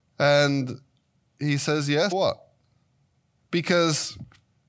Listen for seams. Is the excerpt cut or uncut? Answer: cut